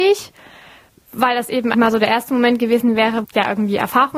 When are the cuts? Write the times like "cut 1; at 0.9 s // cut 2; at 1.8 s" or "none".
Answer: cut 1; at 1.7 s // cut 2; at 3.2 s